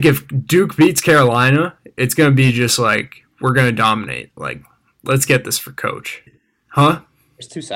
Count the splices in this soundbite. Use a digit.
2